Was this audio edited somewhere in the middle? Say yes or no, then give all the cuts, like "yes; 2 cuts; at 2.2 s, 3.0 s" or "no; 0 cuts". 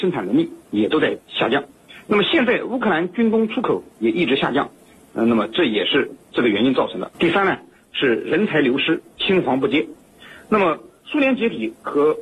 yes; 1 cut; at 7.1 s